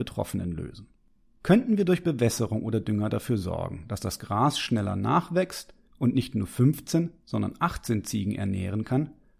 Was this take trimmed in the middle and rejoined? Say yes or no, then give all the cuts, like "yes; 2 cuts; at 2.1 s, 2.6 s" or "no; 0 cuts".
no; 0 cuts